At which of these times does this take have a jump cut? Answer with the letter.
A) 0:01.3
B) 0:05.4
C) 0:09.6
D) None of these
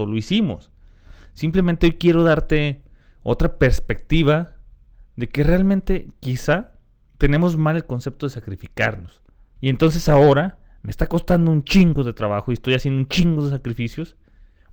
C